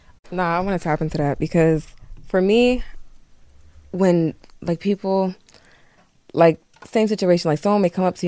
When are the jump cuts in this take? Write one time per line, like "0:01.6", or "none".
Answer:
none